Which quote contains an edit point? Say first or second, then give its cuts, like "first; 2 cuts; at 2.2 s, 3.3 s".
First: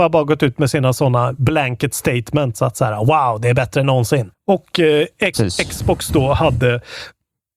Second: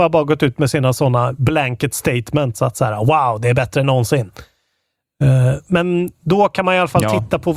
first; 2 cuts; at 4.3 s, 5.3 s